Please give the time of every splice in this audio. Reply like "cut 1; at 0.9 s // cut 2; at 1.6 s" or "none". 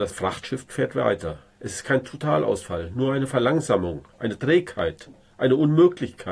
none